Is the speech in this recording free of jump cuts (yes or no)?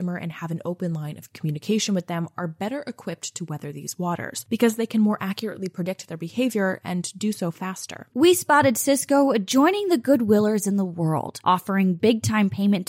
no